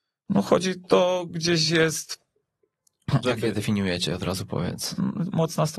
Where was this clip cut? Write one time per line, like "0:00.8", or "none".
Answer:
0:03.2